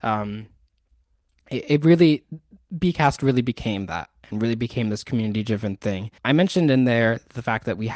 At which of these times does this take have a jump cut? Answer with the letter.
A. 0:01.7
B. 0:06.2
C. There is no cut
B